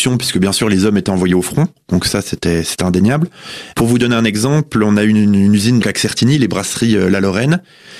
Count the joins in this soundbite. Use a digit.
2